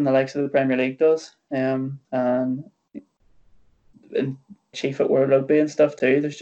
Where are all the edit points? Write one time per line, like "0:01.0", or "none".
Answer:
0:02.0
0:04.7